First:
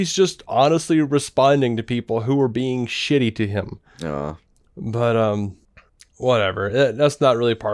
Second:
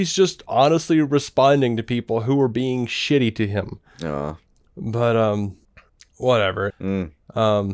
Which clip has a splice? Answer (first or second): second